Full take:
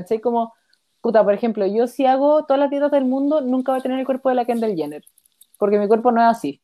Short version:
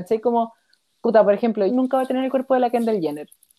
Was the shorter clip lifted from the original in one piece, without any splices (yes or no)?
no